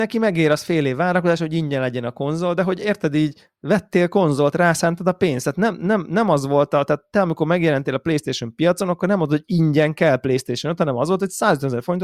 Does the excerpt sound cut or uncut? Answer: uncut